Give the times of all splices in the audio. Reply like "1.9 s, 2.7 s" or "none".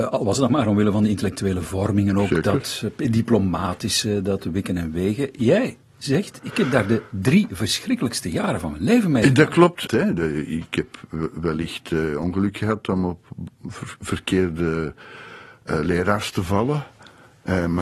9.9 s